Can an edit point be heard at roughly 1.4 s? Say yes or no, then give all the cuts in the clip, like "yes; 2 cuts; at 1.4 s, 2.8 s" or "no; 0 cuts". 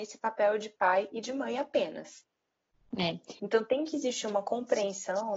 no; 1 cut; at 3.4 s